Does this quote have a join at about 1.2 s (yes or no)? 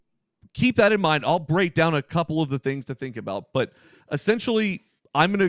no